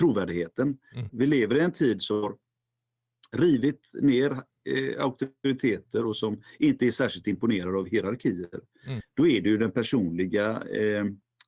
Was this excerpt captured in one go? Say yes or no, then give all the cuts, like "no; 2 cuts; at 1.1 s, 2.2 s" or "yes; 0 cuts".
no; 2 cuts; at 1.1 s, 9.0 s